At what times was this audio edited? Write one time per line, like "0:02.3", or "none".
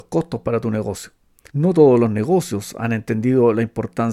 0:01.5